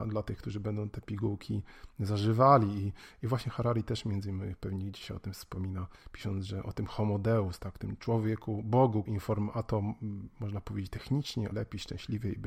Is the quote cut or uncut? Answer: cut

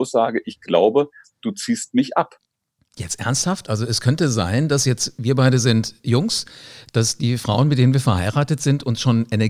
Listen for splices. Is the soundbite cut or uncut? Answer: uncut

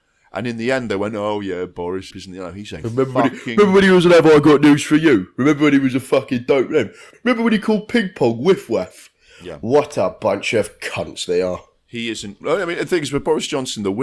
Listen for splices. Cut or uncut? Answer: cut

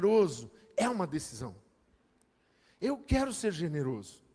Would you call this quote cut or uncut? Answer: uncut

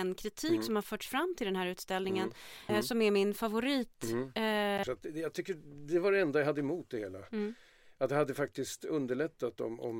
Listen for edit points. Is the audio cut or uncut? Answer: cut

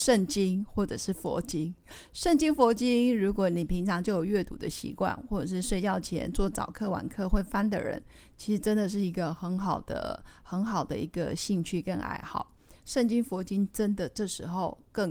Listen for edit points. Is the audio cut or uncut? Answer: uncut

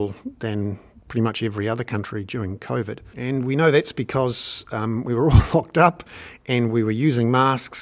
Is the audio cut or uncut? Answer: cut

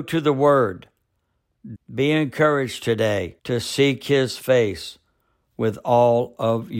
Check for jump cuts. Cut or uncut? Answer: cut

